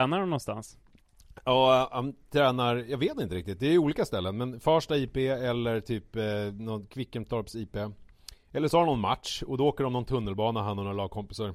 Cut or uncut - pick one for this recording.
uncut